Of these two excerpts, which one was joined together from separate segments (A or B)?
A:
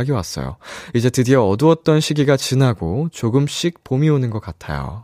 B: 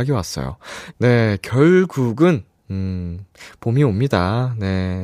B